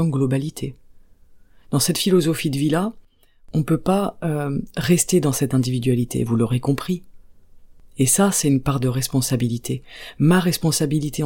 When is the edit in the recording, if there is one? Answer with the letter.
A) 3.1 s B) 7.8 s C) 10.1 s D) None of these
D